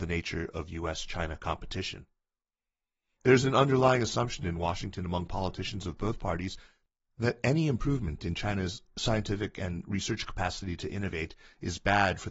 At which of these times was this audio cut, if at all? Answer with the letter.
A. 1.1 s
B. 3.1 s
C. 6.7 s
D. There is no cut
D